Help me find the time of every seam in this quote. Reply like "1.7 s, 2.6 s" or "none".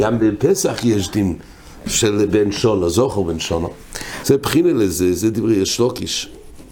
4.2 s

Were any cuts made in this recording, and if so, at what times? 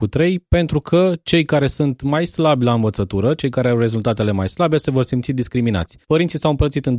6.0 s

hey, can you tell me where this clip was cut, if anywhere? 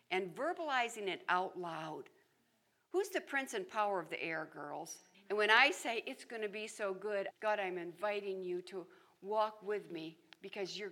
5.1 s, 7.3 s

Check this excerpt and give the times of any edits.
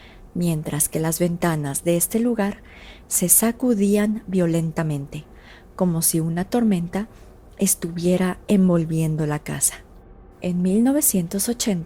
10.3 s

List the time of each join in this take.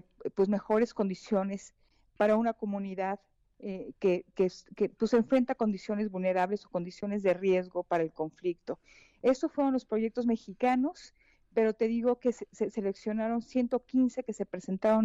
none

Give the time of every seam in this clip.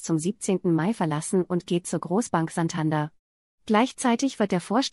none

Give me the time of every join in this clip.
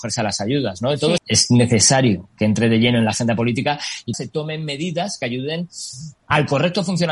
1.2 s, 4.1 s

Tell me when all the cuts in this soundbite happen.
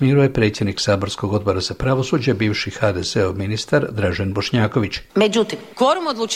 5.1 s

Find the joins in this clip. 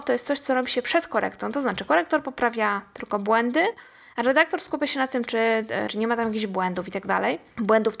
5.9 s

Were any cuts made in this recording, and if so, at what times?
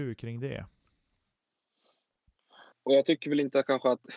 2.7 s

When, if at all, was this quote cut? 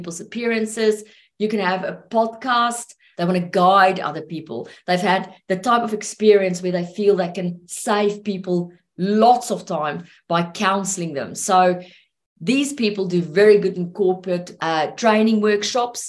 3.1 s, 14.6 s

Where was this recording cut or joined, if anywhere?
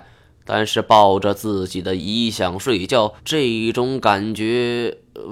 3.2 s

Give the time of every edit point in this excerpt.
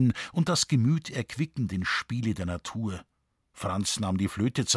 none

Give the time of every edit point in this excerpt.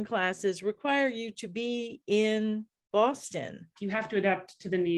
3.8 s

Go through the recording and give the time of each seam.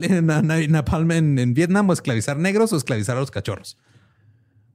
none

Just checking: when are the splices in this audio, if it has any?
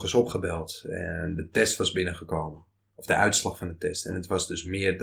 none

